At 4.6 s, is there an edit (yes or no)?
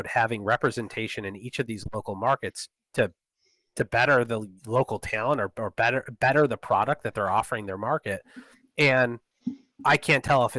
yes